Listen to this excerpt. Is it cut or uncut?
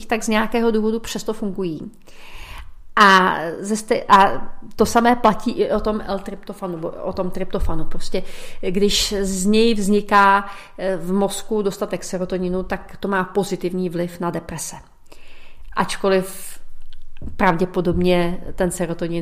uncut